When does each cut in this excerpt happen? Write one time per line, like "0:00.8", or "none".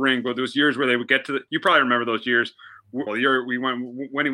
0:03.1